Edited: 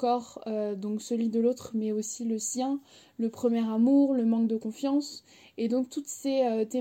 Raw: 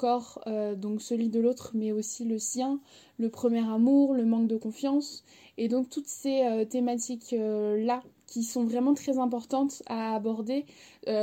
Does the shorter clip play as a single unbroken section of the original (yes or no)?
yes